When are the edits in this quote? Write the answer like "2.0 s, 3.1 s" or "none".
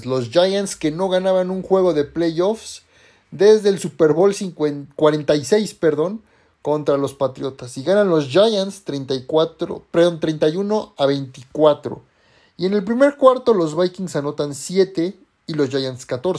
none